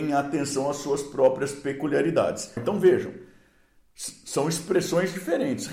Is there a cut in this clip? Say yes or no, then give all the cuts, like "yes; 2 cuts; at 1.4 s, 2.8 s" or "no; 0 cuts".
yes; 1 cut; at 2.6 s